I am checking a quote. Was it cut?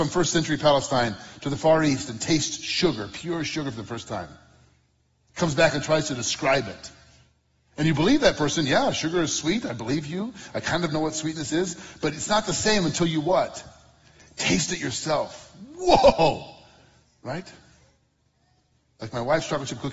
no; 0 cuts

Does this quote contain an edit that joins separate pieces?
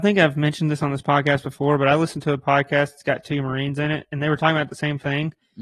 no; 0 cuts

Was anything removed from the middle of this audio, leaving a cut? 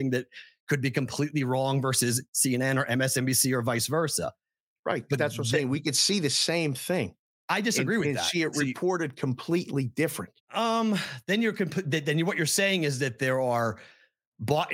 yes; 1 cut; at 10.4 s

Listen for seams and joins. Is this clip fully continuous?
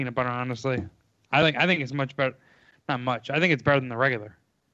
yes; 0 cuts

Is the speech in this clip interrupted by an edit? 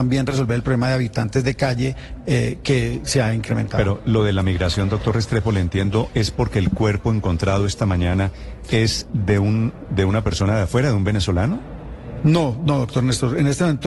no; 0 cuts

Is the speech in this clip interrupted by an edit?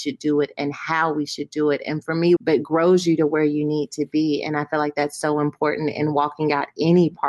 yes; 1 cut; at 2.4 s

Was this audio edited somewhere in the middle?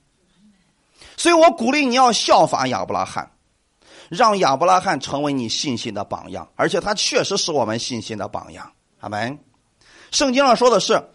no; 0 cuts

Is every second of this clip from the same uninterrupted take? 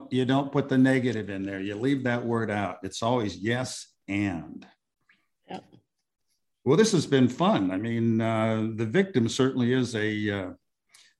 yes; 0 cuts

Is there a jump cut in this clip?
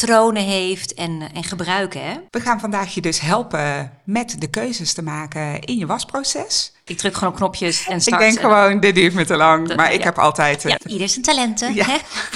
yes; 3 cuts; at 2.3 s, 6.9 s, 10.8 s

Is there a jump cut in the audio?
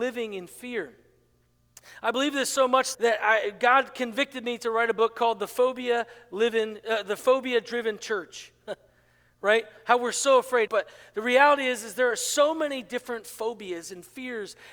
yes; 2 cuts; at 2.9 s, 10.7 s

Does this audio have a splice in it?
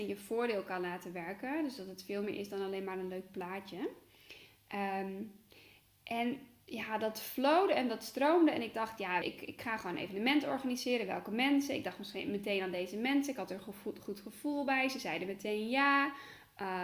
yes; 1 cut; at 9.2 s

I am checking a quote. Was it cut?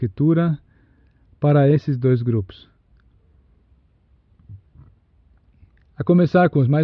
no; 0 cuts

